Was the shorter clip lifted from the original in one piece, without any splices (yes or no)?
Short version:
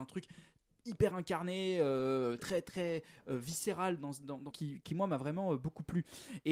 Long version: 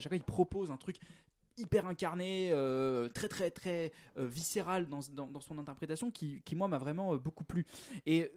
no